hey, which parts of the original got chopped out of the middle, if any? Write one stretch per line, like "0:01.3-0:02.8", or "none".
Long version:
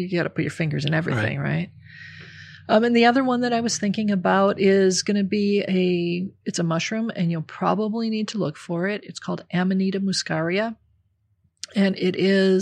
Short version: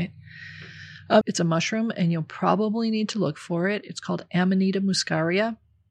0:02.8-0:06.4